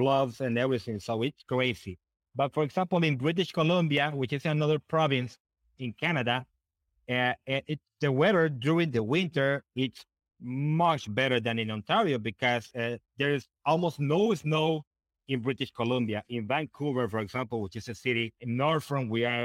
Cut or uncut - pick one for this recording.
uncut